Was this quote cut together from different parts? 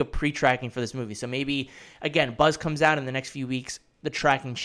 no; 0 cuts

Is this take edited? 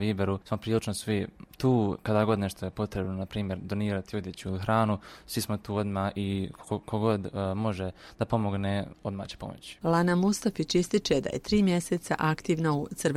no; 0 cuts

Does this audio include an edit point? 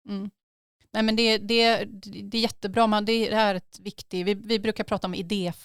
no; 0 cuts

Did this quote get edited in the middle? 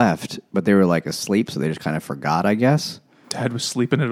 no; 0 cuts

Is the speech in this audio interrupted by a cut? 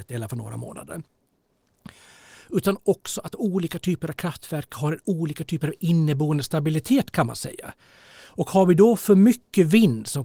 no; 0 cuts

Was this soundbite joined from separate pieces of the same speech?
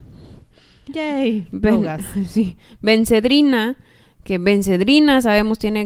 no; 0 cuts

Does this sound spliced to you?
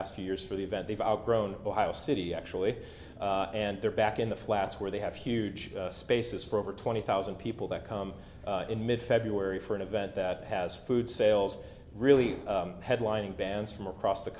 no; 0 cuts

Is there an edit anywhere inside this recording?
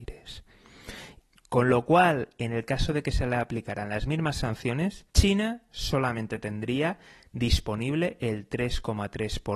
yes; 2 cuts; at 1.3 s, 5.1 s

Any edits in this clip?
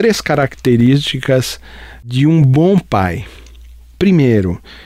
no; 0 cuts

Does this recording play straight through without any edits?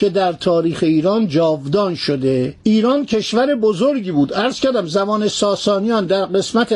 no; 1 cut; at 2.6 s

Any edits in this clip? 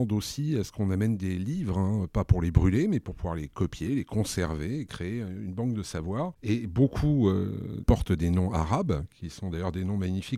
yes; 2 cuts; at 6.3 s, 7.8 s

